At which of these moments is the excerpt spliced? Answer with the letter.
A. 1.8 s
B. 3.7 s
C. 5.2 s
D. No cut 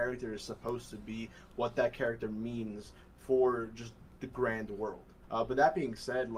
C